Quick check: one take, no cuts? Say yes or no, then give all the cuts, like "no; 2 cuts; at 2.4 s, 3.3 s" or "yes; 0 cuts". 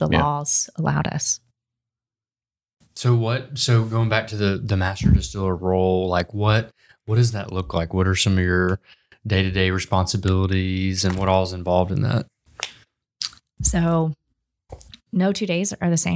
yes; 0 cuts